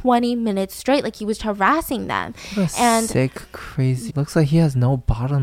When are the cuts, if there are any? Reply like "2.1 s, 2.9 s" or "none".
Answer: 1.4 s, 4.1 s